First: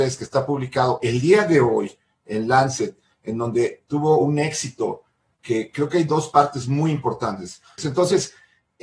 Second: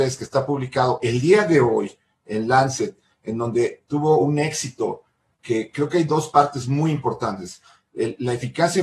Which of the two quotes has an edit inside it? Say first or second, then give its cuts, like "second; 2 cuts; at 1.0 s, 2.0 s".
first; 1 cut; at 7.8 s